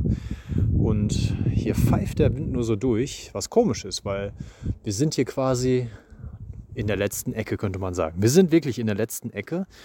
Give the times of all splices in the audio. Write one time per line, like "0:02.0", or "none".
none